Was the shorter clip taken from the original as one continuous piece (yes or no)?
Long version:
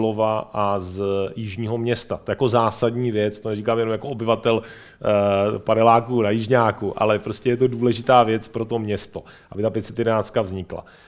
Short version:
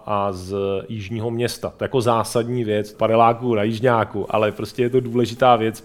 no